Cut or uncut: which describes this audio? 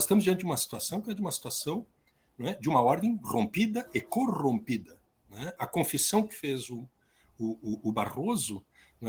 uncut